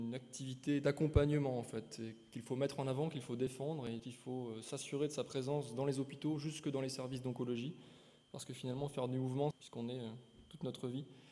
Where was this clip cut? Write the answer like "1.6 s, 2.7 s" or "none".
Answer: 4.0 s, 9.5 s